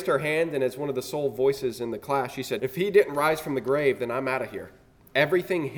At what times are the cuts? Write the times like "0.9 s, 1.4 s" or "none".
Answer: 2.6 s